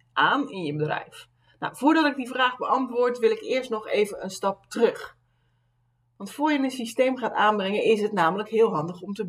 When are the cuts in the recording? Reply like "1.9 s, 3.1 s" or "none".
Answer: none